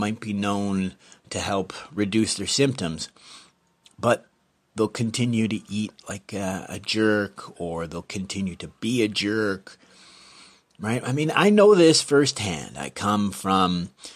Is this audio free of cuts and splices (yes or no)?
yes